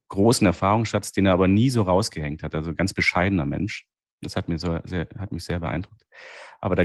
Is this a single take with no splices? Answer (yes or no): yes